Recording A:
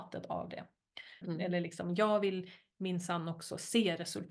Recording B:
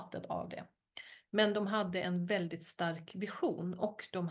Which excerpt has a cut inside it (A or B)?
A